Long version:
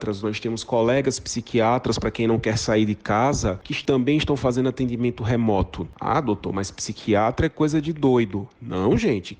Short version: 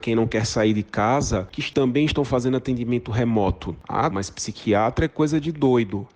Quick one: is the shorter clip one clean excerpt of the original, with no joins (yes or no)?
no